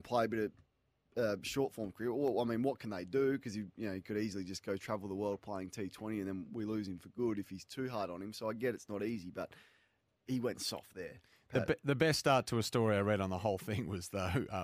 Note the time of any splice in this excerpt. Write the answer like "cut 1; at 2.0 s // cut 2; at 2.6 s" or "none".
none